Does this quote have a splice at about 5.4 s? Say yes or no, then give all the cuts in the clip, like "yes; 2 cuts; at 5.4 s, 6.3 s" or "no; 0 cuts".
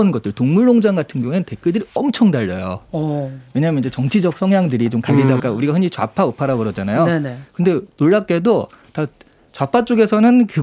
yes; 1 cut; at 5.4 s